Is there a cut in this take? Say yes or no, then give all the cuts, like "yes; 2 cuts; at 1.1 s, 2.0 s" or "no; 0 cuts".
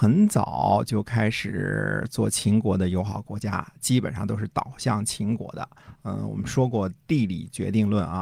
yes; 1 cut; at 6.0 s